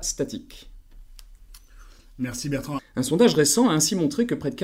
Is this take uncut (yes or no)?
no